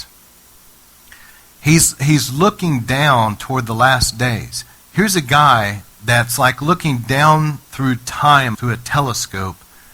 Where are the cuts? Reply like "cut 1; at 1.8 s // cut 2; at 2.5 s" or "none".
cut 1; at 4.7 s // cut 2; at 8.5 s